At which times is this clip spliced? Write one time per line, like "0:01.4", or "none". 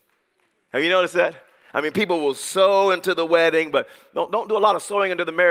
none